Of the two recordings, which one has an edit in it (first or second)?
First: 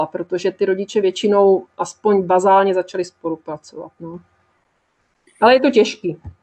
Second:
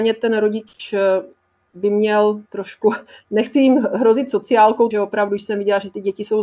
second